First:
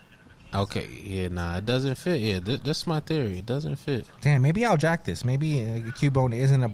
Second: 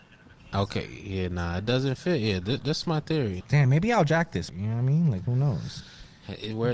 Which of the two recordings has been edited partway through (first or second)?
second